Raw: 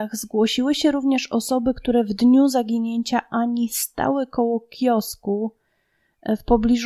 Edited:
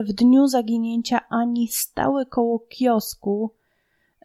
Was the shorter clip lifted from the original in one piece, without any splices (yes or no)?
yes